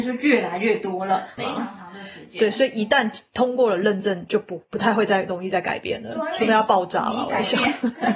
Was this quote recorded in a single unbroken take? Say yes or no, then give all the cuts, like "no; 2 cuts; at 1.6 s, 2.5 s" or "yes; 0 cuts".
no; 1 cut; at 1.4 s